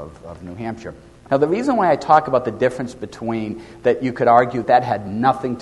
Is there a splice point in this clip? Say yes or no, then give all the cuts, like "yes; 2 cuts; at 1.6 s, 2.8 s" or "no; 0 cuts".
yes; 2 cuts; at 1.3 s, 4.6 s